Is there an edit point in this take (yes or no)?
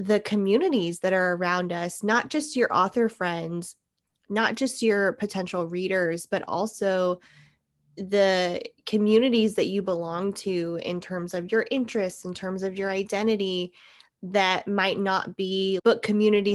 no